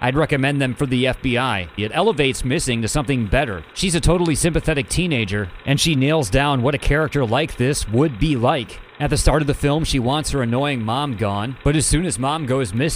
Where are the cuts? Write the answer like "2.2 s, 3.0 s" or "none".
1.8 s